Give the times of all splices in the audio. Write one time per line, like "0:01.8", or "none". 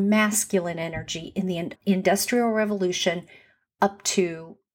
0:01.8